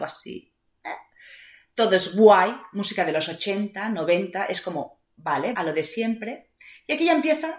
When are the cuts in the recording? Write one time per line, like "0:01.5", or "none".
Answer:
0:05.5